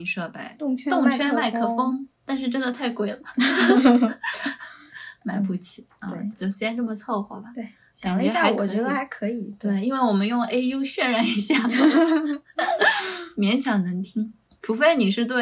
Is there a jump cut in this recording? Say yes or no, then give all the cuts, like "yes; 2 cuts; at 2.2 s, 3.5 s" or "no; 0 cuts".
yes; 1 cut; at 6.3 s